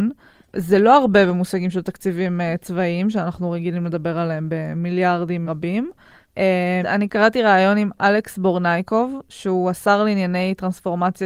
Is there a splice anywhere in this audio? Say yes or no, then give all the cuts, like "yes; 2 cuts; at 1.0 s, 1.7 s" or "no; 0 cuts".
yes; 2 cuts; at 5.5 s, 6.8 s